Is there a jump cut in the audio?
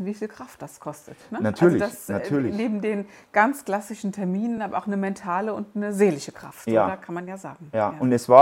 no; 0 cuts

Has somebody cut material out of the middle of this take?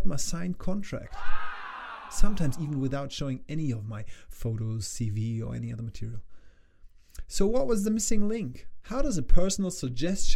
no; 0 cuts

